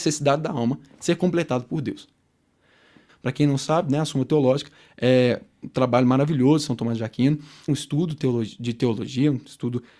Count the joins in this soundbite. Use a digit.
2